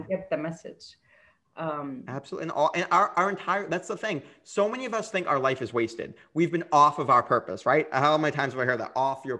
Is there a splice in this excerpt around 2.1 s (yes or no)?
no